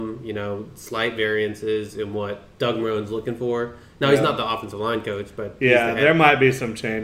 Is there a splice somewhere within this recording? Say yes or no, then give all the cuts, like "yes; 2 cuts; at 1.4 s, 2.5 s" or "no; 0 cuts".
no; 0 cuts